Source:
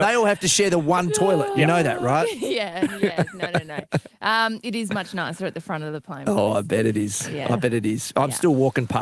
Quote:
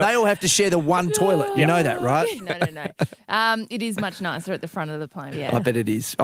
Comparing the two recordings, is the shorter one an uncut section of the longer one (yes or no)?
no